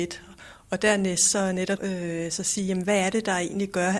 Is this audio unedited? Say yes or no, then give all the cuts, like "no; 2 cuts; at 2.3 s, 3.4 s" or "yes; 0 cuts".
no; 1 cut; at 1.8 s